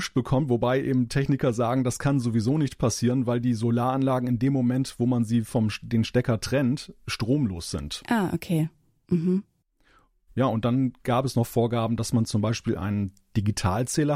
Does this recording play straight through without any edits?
yes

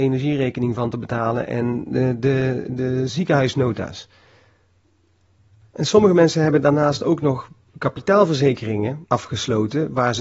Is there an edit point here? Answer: no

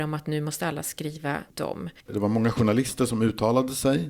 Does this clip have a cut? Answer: yes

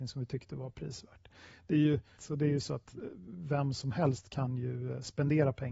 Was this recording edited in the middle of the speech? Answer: yes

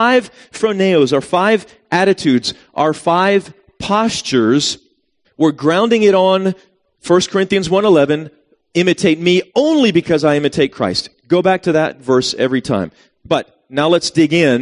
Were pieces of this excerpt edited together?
yes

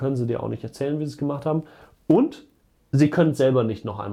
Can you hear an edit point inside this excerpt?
no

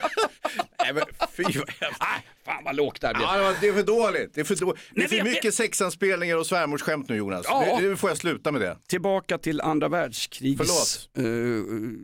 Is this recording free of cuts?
yes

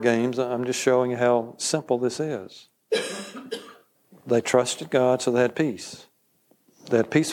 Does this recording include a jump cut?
no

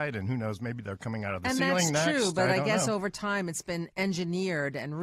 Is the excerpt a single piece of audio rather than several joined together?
yes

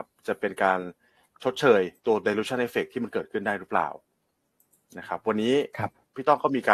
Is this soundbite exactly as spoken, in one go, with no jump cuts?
no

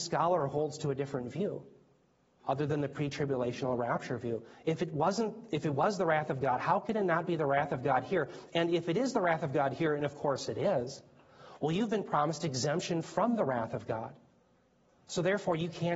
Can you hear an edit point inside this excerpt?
no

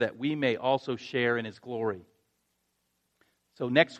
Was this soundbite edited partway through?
no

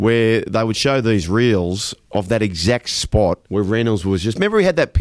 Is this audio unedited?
no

